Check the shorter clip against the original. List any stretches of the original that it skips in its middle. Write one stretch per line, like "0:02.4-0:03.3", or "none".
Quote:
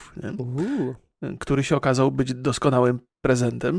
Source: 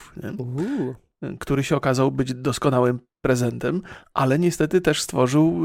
none